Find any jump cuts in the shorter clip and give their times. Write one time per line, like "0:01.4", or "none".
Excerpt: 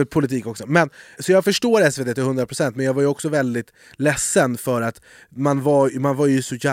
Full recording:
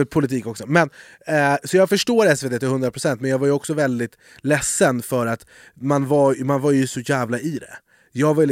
0:01.2